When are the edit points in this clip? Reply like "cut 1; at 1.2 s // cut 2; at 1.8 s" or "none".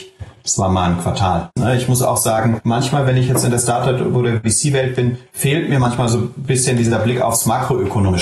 cut 1; at 1.6 s